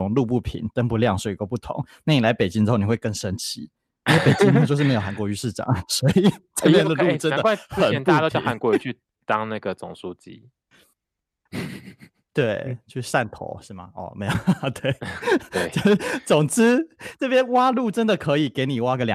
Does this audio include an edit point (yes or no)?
no